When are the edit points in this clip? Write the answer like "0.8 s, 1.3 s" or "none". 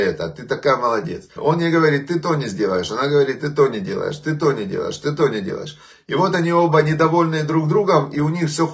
1.4 s